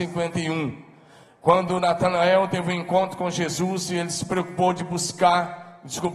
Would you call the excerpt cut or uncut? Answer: uncut